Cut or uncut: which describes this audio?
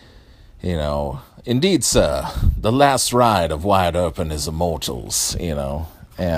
uncut